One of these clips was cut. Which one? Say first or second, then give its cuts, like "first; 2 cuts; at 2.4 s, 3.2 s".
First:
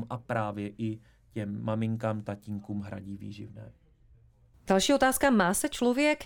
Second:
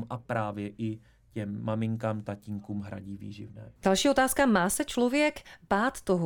second; 1 cut; at 3.8 s